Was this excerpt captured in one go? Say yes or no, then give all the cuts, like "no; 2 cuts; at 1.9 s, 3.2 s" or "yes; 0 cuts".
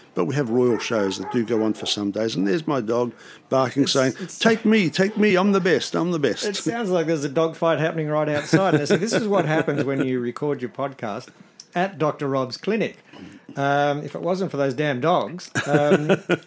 yes; 0 cuts